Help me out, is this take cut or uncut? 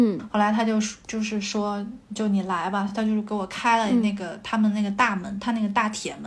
uncut